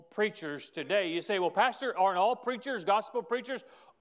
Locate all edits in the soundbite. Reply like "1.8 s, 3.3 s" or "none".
none